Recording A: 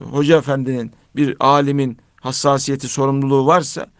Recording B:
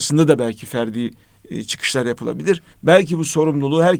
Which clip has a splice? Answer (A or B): B